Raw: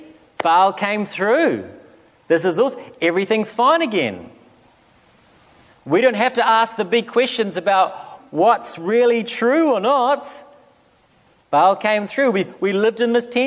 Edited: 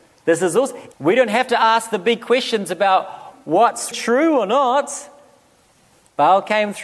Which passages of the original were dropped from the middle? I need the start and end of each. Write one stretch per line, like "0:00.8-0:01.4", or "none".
0:03.0-0:05.8
0:08.8-0:09.3